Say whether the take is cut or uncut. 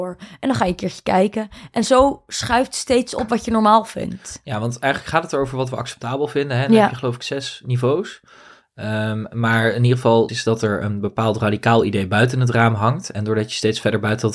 cut